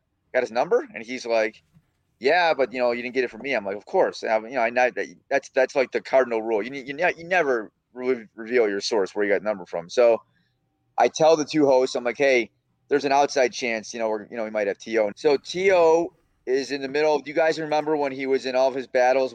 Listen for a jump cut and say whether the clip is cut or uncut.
cut